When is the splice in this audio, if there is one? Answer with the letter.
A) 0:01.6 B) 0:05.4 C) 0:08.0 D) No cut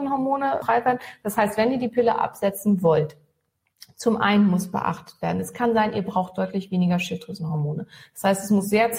D